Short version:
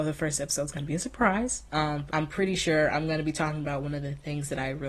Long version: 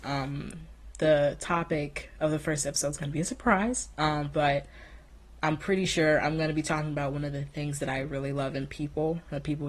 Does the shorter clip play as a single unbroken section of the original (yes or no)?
no